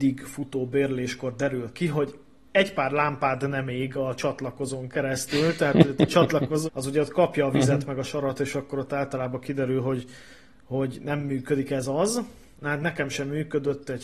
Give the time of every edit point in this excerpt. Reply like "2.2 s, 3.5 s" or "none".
6.7 s

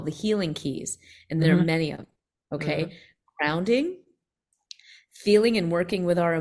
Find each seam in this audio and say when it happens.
none

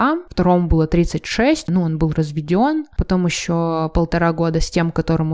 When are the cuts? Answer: 1.6 s, 2.9 s

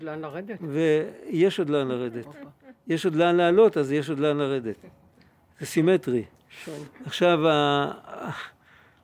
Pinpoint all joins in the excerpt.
none

